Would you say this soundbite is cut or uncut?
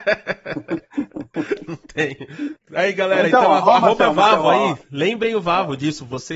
cut